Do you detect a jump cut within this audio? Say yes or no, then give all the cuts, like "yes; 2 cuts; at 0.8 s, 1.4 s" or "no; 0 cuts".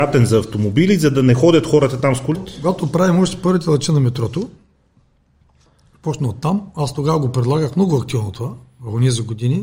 yes; 1 cut; at 2.3 s